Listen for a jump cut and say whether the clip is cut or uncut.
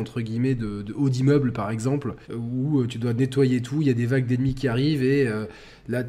cut